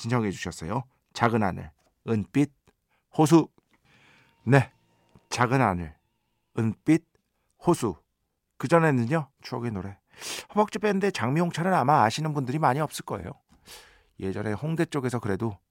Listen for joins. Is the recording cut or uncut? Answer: cut